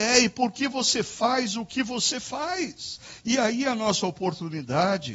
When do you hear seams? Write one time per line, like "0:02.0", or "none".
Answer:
none